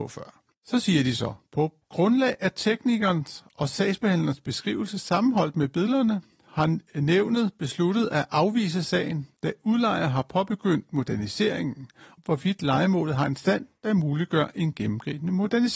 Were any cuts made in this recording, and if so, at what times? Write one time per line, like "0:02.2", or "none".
0:01.8
0:09.4
0:12.2